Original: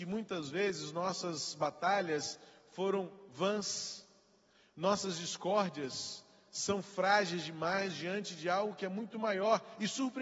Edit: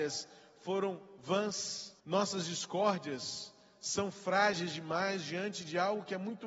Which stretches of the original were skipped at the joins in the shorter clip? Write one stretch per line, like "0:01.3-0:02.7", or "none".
0:04.1-0:04.7

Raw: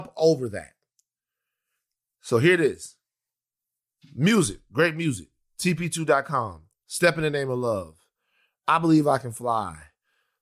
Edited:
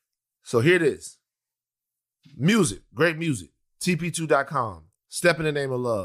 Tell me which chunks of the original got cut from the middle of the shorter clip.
none

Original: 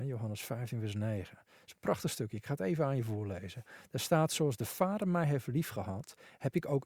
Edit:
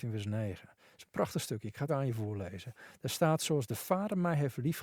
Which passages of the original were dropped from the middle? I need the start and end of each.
0:02.6-0:02.8

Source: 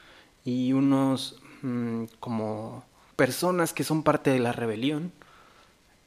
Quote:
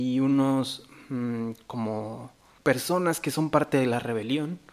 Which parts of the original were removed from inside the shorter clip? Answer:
none

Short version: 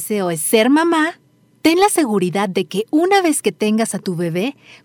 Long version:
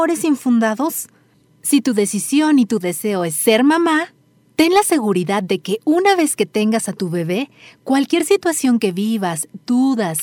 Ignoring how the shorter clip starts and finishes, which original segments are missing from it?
none

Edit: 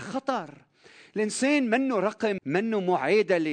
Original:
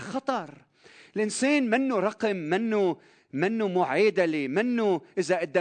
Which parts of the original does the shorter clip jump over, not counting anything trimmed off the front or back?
0:02.4-0:03.3

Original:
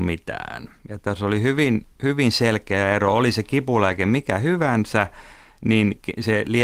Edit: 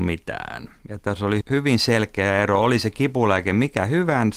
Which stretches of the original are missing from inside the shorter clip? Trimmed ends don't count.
0:01.4-0:01.9

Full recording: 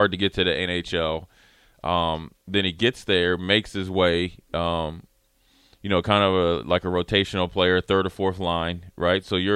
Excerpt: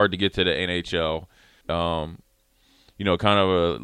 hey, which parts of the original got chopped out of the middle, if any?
0:01.6-0:04.5

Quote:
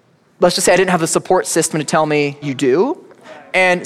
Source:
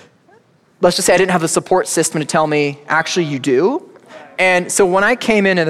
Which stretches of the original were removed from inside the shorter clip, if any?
0:02.8-0:03.3

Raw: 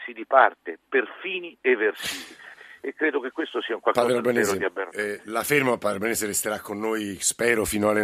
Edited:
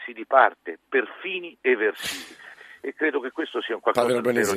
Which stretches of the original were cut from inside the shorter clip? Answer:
none

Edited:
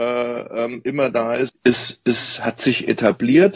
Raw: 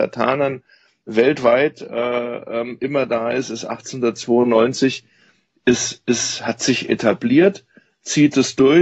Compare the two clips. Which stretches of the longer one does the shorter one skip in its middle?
0:03.4-0:05.5

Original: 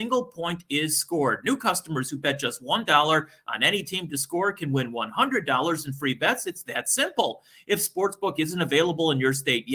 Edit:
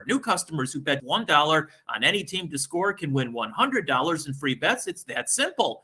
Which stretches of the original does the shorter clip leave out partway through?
0:02.4-0:02.6

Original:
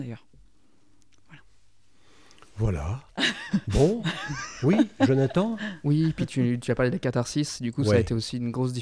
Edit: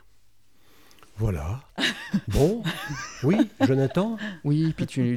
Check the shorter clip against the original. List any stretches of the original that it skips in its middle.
none

